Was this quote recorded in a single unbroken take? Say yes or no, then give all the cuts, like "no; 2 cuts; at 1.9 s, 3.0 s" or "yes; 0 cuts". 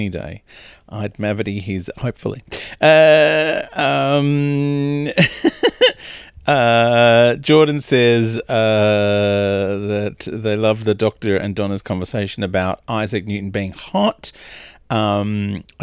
no; 1 cut; at 1.9 s